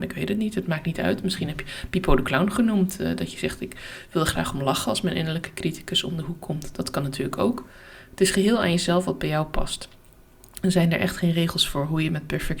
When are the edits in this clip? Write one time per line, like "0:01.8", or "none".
none